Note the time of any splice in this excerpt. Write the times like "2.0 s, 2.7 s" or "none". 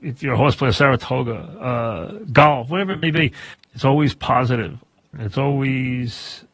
3.5 s, 5.1 s